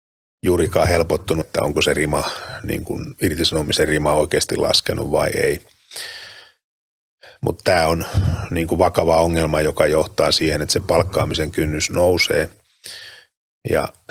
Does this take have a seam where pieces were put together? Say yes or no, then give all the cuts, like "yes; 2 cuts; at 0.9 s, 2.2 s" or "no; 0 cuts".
yes; 1 cut; at 1.4 s